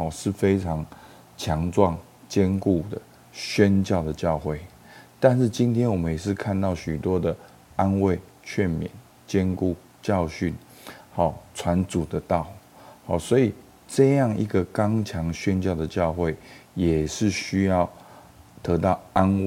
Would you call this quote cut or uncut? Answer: uncut